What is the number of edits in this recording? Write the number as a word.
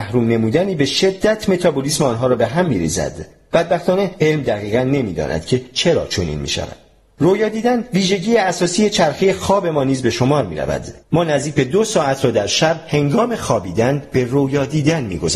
one